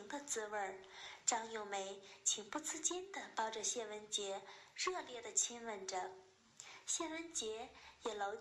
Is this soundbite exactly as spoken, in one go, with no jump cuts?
yes; 0 cuts

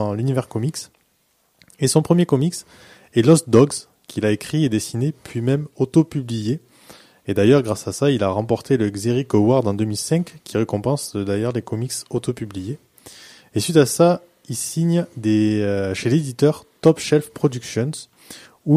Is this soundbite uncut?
yes; 0 cuts

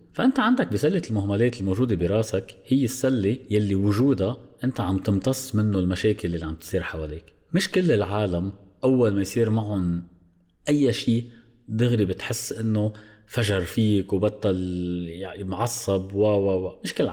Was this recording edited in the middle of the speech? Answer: no; 0 cuts

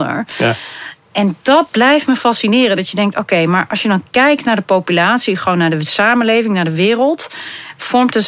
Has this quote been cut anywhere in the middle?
no; 0 cuts

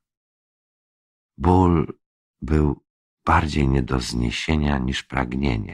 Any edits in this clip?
no; 0 cuts

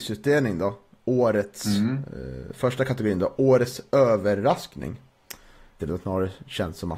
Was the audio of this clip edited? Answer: yes; 2 cuts; at 2.1 s, 5.8 s

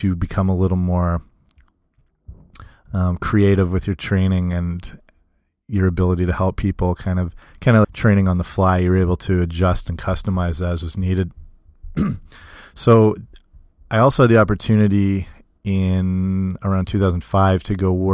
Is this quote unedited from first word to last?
no; 1 cut; at 7.8 s

